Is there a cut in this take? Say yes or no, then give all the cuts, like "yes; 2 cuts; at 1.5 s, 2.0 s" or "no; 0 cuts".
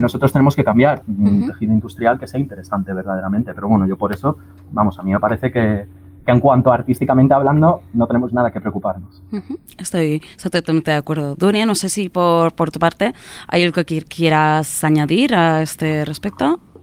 yes; 1 cut; at 1.0 s